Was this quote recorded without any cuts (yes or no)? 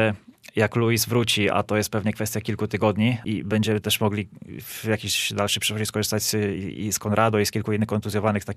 no